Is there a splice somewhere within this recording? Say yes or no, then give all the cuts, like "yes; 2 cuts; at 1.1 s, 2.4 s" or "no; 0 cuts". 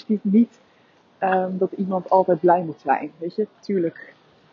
no; 0 cuts